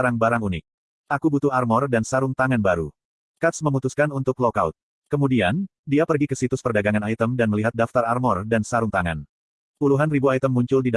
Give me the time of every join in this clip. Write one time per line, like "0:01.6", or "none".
none